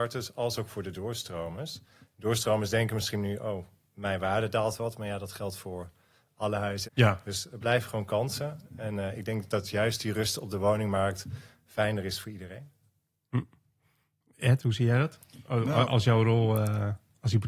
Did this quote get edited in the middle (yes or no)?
yes